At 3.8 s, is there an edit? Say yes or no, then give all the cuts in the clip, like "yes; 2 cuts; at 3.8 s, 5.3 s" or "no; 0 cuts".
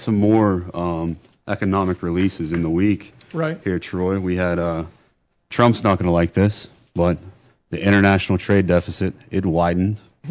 no; 0 cuts